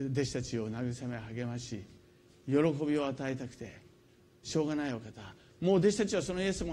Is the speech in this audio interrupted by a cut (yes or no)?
no